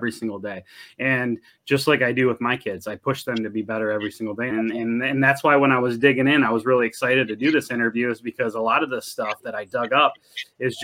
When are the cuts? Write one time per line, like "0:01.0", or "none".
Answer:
0:04.5